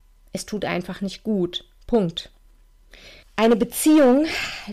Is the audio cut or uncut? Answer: cut